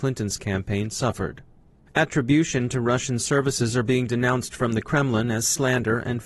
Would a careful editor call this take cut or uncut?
cut